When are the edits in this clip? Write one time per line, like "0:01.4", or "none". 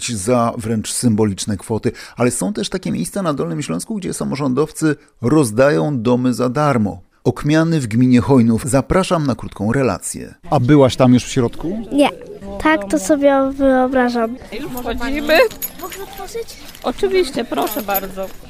0:07.1
0:08.6
0:10.4